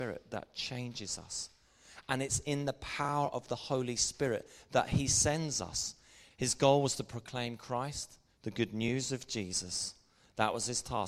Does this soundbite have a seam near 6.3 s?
yes; 2 cuts; at 6.3 s, 8.4 s

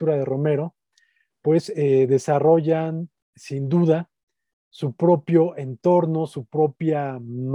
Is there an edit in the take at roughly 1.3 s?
no; 0 cuts

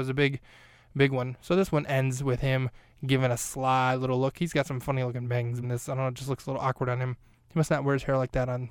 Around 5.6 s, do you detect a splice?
yes; 1 cut; at 5.6 s

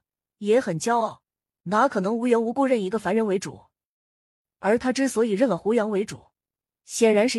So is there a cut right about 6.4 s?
no; 0 cuts

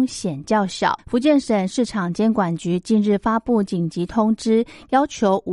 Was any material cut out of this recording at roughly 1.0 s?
yes; 1 cut; at 1.0 s

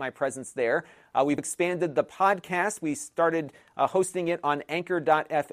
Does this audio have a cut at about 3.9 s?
no; 1 cut; at 1.4 s

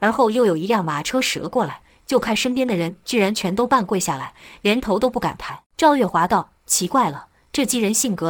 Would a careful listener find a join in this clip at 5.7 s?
yes; 1 cut; at 5.7 s

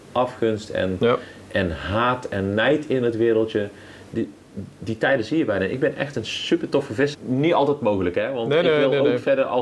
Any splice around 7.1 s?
yes; 1 cut; at 7.1 s

